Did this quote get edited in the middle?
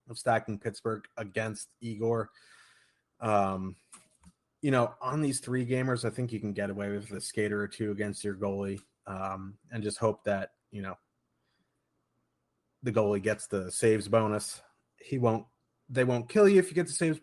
no; 0 cuts

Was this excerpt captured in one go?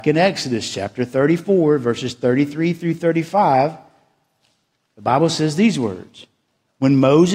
yes; 0 cuts

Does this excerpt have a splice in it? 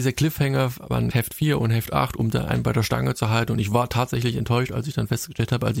yes; 1 cut; at 1.1 s

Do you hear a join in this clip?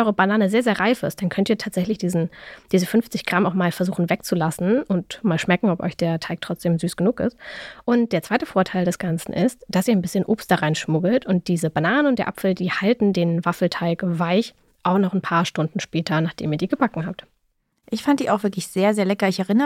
no; 0 cuts

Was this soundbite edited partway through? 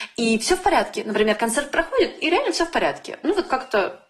no; 0 cuts

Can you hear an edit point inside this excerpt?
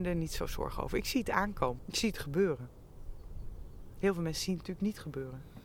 yes; 1 cut; at 1.8 s

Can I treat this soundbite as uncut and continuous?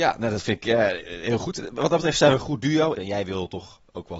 no; 1 cut; at 3.0 s

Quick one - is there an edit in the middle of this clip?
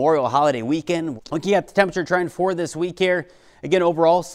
yes; 1 cut; at 1.2 s

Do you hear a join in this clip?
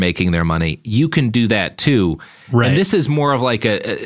no; 0 cuts

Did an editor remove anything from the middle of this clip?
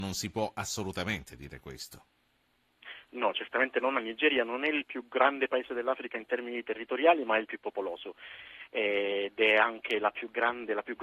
no; 0 cuts

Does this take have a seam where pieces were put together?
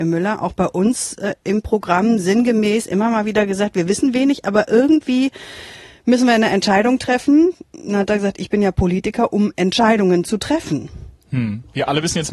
no; 0 cuts

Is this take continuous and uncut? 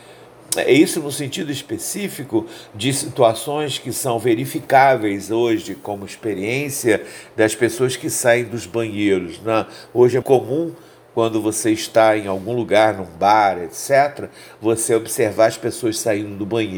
no; 1 cut; at 10.2 s

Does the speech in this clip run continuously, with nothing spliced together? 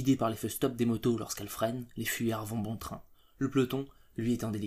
yes; 0 cuts

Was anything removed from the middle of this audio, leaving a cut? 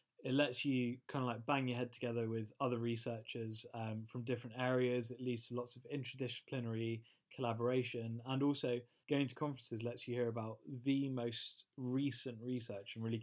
yes; 1 cut; at 9.0 s

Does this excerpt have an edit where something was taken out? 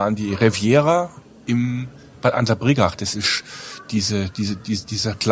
no; 0 cuts

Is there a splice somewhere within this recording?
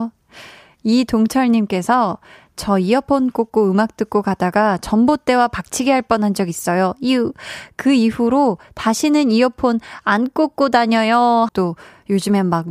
yes; 1 cut; at 11.5 s

